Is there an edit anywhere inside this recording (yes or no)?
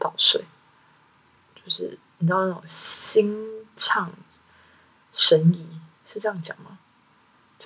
yes